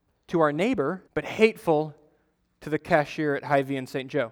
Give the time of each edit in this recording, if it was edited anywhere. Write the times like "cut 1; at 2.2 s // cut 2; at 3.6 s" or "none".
cut 1; at 1.1 s